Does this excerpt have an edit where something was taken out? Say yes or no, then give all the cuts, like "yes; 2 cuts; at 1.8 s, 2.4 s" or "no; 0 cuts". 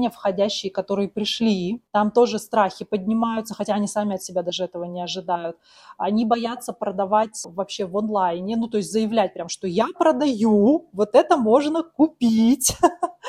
no; 0 cuts